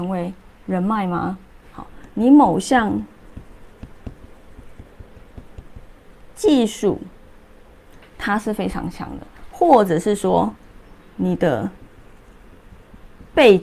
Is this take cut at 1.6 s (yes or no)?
yes